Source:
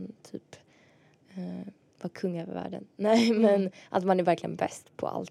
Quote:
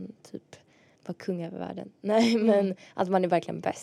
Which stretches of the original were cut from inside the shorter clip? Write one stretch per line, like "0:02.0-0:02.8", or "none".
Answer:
0:01.0-0:01.9